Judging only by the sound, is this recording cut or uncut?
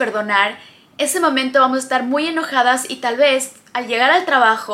uncut